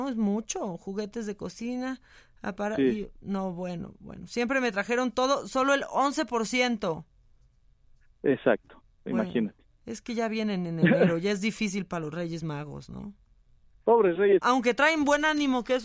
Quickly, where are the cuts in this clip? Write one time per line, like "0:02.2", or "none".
0:14.4